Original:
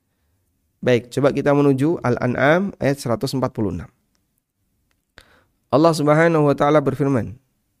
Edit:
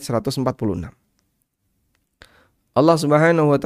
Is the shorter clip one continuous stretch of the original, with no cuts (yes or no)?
yes